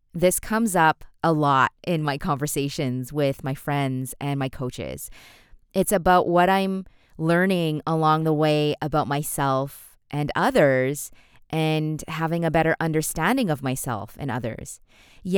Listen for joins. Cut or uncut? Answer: uncut